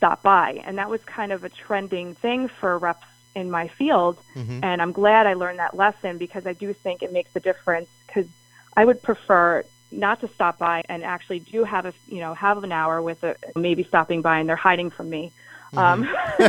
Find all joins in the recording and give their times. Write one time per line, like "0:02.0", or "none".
0:10.8
0:13.6